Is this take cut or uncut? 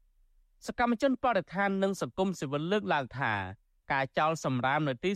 uncut